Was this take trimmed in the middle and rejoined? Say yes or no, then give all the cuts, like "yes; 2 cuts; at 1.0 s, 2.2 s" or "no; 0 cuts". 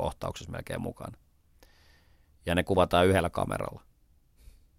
no; 0 cuts